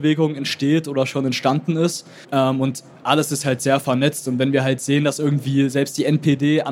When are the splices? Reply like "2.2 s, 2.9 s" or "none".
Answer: 2.2 s